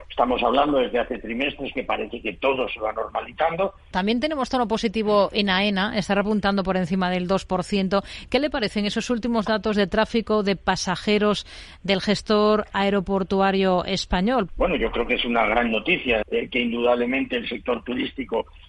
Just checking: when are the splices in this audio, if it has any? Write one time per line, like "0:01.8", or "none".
0:03.9
0:14.5
0:16.2